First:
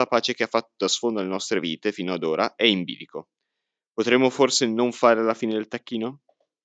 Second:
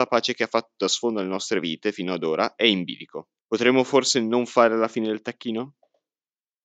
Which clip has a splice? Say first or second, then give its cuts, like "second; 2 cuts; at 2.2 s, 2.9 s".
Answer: second; 1 cut; at 3.4 s